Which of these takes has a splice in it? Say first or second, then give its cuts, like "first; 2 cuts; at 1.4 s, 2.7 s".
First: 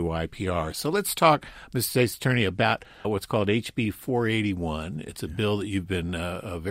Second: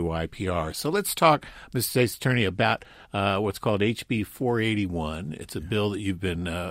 first; 1 cut; at 3.0 s